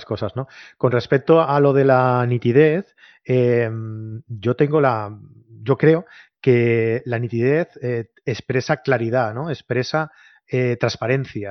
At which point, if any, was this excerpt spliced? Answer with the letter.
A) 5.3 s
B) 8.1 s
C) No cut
C